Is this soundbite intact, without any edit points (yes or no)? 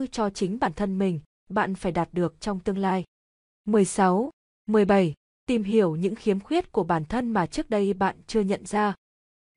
no